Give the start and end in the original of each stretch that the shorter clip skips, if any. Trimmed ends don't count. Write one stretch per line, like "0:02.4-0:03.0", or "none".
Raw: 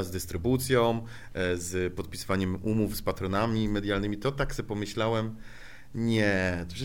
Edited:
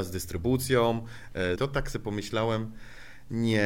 0:01.6-0:04.2